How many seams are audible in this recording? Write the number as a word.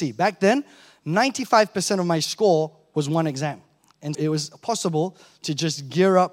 one